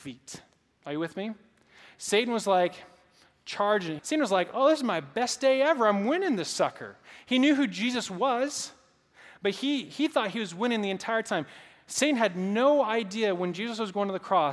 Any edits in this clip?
yes; 1 cut; at 4.0 s

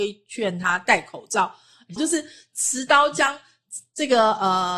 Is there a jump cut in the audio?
yes; 1 cut; at 2.0 s

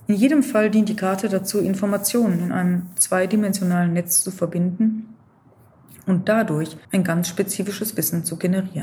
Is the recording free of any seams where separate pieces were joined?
no; 1 cut; at 6.8 s

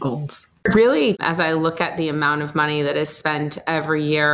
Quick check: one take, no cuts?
no; 1 cut; at 1.1 s

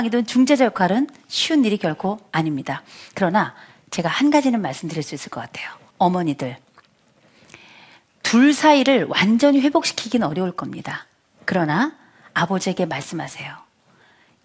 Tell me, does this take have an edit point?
yes; 1 cut; at 5.9 s

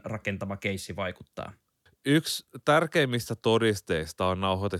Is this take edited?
yes; 1 cut; at 1.9 s

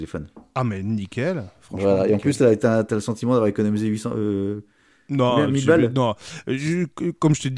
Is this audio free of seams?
yes; 0 cuts

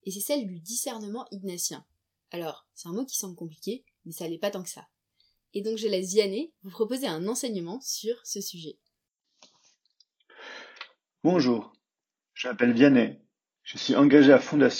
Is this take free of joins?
yes; 0 cuts

